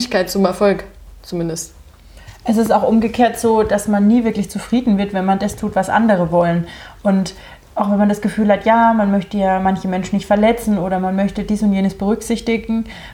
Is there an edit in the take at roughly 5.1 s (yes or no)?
no